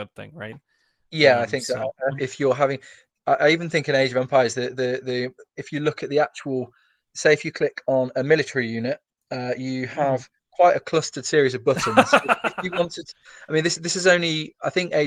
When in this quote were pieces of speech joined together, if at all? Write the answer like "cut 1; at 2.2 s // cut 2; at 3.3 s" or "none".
cut 1; at 2.2 s